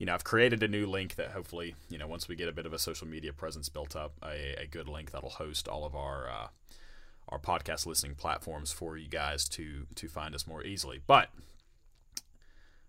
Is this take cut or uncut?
uncut